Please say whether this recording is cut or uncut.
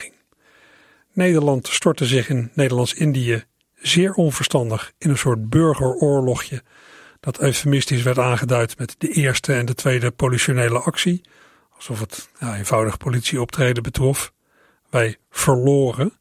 uncut